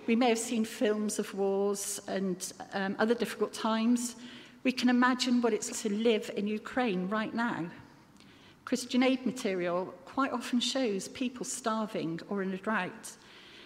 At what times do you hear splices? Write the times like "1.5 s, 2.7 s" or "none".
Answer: 5.7 s